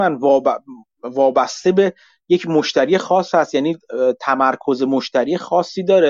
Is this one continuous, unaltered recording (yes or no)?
yes